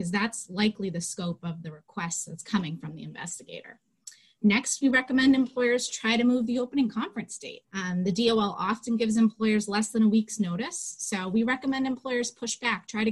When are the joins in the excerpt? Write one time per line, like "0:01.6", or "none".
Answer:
0:07.6